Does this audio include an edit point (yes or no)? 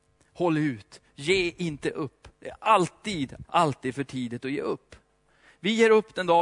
yes